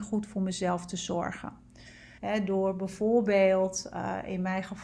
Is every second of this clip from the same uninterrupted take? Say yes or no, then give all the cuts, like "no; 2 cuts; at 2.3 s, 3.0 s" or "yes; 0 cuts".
no; 1 cut; at 2.2 s